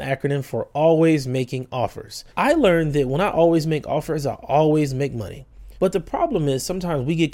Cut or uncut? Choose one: cut